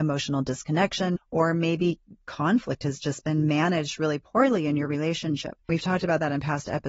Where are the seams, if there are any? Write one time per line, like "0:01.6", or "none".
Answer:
0:01.2
0:05.7